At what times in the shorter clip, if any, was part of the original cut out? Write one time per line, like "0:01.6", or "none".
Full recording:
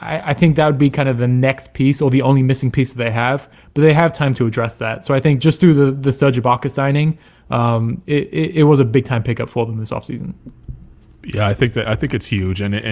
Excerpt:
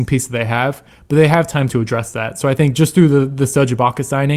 none

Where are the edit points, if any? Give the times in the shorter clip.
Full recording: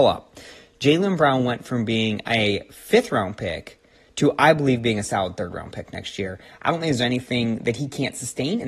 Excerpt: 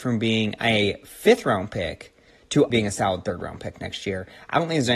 0:02.7

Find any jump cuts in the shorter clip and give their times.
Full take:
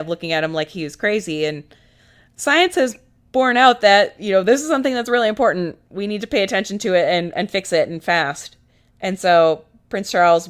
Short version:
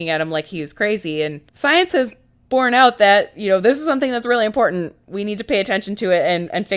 0:01.5

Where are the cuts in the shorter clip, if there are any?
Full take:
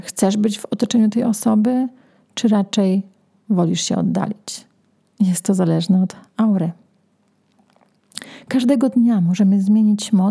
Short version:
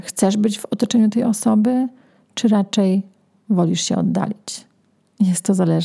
none

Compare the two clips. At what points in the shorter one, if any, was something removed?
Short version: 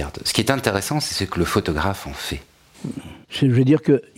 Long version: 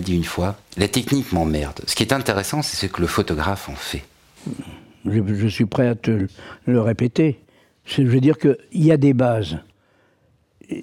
0:03.2

